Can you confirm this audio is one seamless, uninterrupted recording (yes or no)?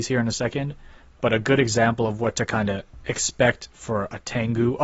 yes